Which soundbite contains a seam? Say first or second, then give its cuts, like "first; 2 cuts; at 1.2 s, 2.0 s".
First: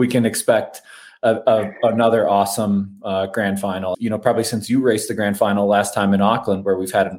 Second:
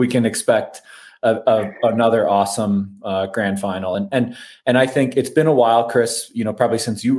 first; 1 cut; at 3.9 s